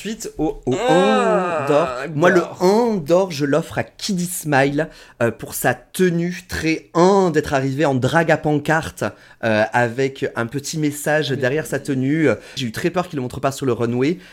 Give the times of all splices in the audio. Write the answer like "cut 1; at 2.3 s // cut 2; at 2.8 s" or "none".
cut 1; at 12.6 s